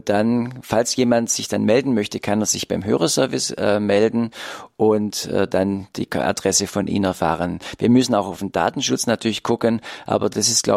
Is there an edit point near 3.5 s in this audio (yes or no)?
no